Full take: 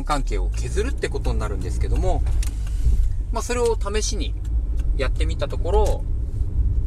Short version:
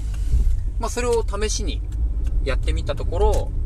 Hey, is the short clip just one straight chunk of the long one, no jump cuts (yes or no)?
yes